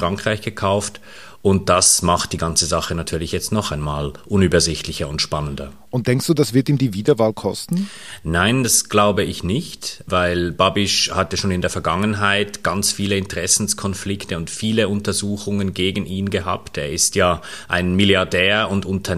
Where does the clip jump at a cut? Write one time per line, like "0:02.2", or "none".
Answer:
none